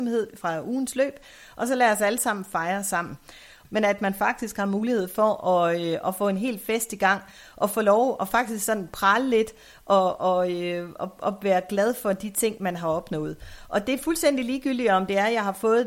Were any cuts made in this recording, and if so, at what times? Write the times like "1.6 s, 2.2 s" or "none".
3.6 s